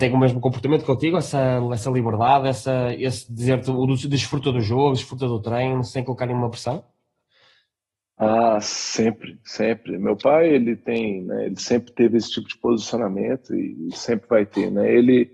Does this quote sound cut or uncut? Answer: uncut